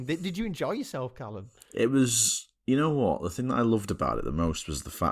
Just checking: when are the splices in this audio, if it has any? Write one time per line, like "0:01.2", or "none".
none